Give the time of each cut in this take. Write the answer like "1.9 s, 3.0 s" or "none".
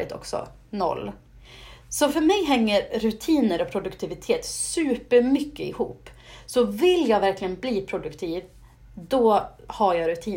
none